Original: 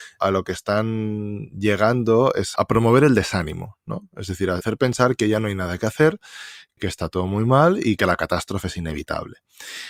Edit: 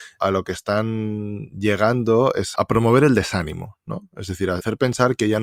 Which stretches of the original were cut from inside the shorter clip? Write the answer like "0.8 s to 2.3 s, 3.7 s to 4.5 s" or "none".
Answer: none